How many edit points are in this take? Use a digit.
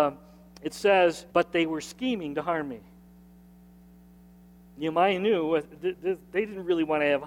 1